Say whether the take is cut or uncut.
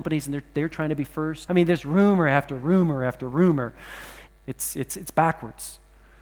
cut